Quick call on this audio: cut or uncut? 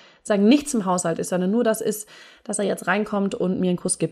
uncut